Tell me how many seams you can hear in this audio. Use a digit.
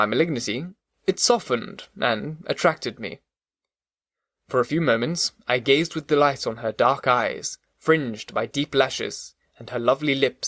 0